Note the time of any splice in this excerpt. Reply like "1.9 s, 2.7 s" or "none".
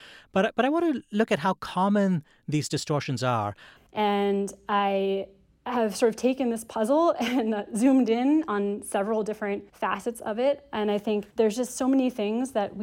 3.8 s, 9.7 s, 11.3 s